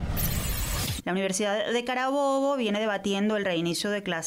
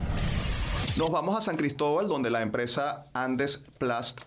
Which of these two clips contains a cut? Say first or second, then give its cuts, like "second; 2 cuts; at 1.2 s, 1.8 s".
first; 1 cut; at 1.0 s